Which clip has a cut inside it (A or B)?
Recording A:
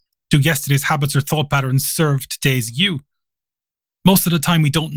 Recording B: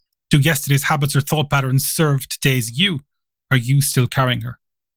B